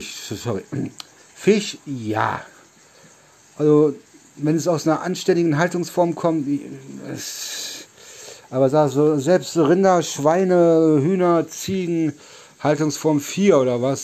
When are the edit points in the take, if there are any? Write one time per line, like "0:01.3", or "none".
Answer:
none